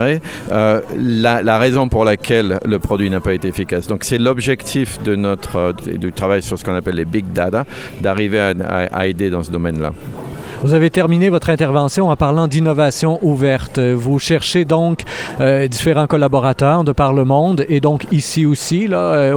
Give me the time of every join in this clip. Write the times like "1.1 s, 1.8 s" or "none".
5.8 s